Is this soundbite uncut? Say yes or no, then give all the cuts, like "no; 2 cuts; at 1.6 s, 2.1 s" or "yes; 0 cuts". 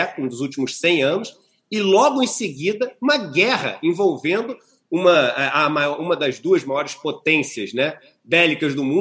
yes; 0 cuts